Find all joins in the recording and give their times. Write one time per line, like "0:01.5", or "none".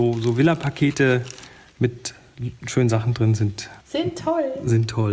0:03.8